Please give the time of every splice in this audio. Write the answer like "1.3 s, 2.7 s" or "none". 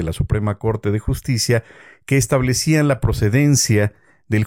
none